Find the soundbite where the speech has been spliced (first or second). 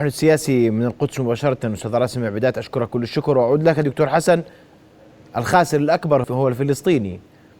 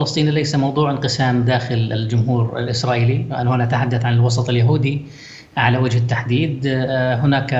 first